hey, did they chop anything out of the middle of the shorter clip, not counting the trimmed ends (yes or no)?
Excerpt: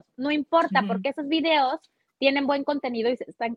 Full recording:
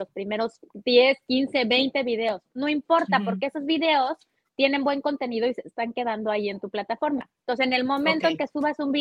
no